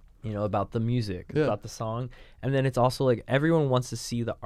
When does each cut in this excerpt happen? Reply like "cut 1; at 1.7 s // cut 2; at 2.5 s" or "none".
none